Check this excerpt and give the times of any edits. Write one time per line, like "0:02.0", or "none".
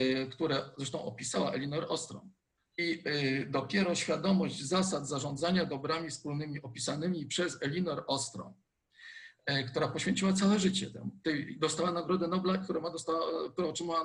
0:02.6
0:12.6

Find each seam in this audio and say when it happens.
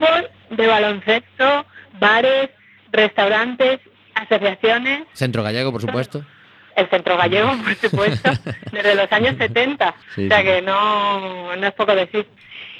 0:10.0

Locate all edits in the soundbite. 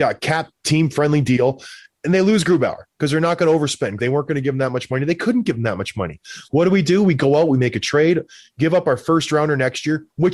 0:04.0

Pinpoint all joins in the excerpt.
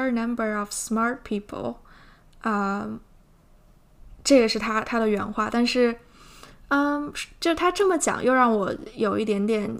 none

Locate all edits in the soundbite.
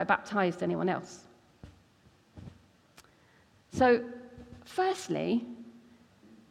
none

